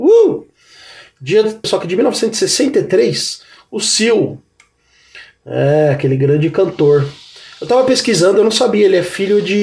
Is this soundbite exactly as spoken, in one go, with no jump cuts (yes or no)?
no